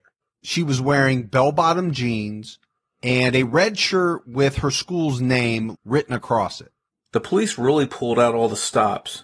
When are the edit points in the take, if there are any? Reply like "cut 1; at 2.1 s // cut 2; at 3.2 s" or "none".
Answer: cut 1; at 5.7 s